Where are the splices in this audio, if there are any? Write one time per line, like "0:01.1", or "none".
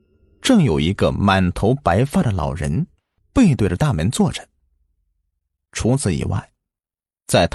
none